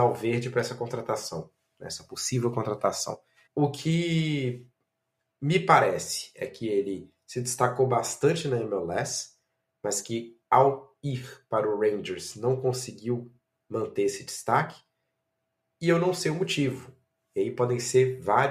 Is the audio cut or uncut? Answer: cut